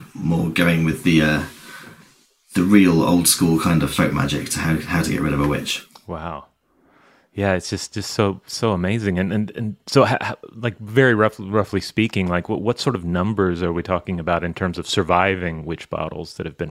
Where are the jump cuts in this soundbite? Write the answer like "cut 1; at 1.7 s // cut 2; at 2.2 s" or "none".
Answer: none